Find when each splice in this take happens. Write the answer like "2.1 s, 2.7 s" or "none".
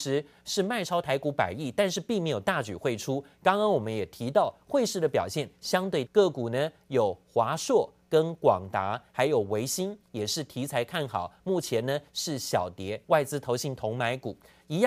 6.1 s, 13.0 s